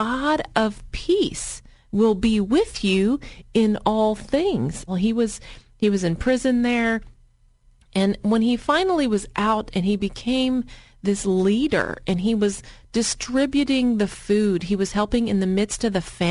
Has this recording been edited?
yes; 1 cut; at 4.9 s

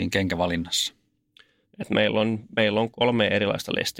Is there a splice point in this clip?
yes; 2 cuts; at 1.6 s, 2.9 s

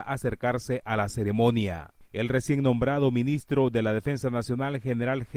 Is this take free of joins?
yes; 0 cuts

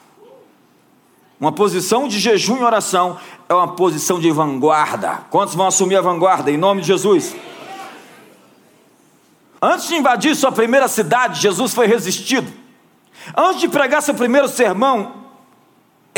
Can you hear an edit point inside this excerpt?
no; 0 cuts

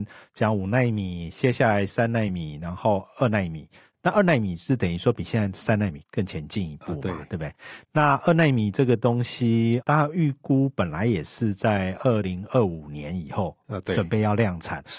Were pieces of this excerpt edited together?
no; 0 cuts

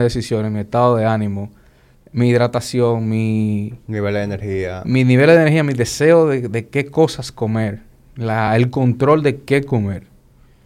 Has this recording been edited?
no; 0 cuts

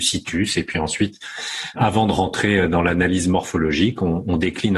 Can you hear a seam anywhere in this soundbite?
yes; 1 cut; at 1.8 s

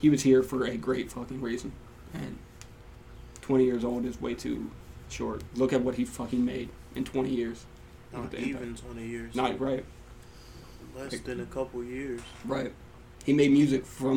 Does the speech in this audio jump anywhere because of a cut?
yes; 1 cut; at 5.5 s

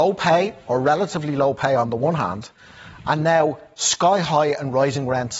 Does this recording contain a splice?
no; 0 cuts

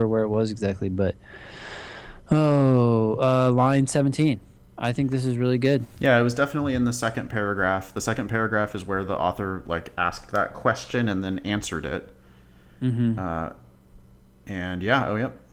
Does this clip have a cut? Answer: no; 0 cuts

